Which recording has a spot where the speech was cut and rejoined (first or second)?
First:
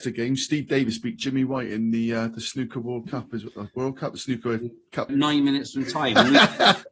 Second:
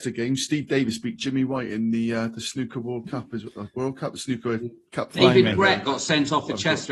first